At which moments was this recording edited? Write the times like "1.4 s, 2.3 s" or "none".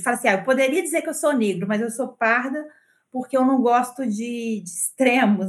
none